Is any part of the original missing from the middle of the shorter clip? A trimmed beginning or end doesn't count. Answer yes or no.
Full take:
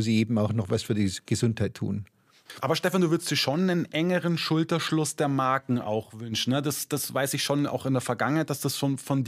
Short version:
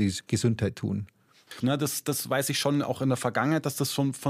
yes